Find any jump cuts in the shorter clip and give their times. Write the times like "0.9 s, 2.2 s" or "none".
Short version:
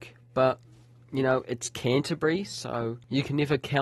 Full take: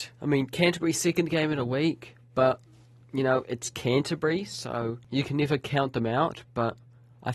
none